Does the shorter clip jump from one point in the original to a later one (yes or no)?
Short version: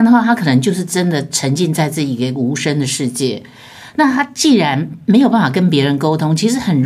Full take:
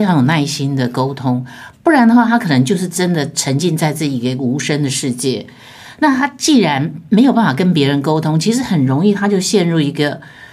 no